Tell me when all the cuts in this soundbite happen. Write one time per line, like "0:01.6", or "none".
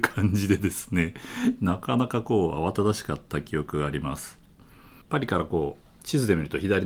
0:05.0